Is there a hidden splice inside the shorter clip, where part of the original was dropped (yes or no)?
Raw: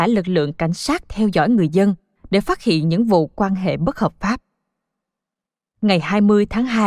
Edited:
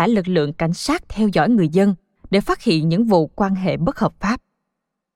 no